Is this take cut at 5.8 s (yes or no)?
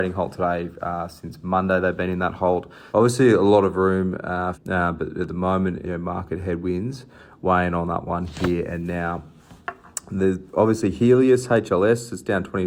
yes